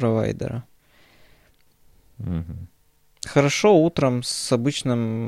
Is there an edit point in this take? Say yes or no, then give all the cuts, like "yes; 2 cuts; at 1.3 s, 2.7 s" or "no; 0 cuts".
no; 0 cuts